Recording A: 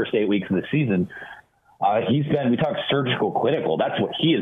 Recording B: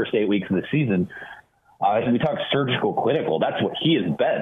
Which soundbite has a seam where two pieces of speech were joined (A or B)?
B